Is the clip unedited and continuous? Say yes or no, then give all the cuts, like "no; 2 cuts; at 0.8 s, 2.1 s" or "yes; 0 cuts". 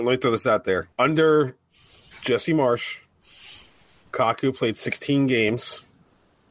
no; 1 cut; at 0.9 s